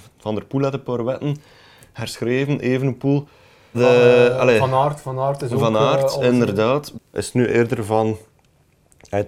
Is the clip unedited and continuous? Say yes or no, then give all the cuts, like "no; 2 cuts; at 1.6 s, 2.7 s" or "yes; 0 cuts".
no; 2 cuts; at 3.7 s, 6.9 s